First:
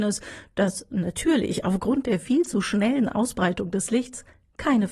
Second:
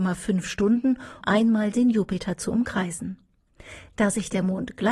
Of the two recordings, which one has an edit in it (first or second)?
second